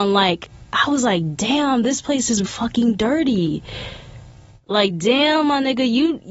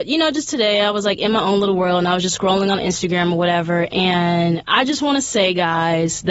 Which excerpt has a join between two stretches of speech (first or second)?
first